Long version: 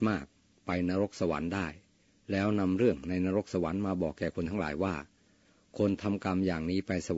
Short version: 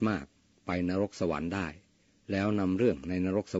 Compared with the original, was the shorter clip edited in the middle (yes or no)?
no